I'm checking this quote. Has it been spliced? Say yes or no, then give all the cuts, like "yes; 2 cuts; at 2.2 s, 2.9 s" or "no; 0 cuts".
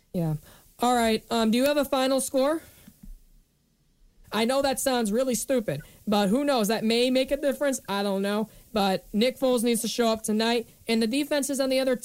yes; 2 cuts; at 4.2 s, 10.7 s